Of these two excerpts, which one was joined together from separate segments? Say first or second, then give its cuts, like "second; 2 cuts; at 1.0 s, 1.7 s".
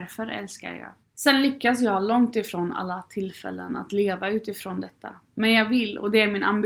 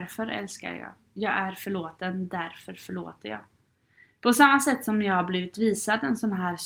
first; 1 cut; at 1.0 s